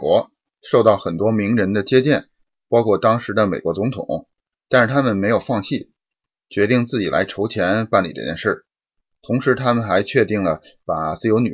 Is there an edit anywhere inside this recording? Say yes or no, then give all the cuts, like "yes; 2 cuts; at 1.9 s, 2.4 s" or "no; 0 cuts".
yes; 1 cut; at 4.7 s